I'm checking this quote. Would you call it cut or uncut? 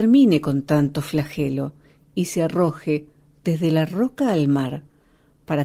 uncut